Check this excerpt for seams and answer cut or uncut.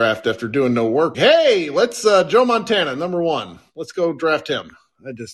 cut